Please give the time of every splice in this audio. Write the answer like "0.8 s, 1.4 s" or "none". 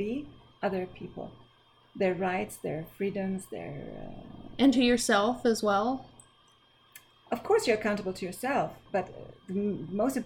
8.9 s